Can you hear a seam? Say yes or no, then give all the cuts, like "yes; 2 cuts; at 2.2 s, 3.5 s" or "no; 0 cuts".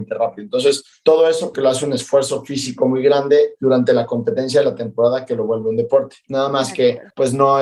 yes; 1 cut; at 1.5 s